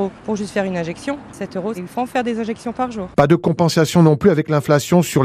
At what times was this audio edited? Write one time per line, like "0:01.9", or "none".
0:01.7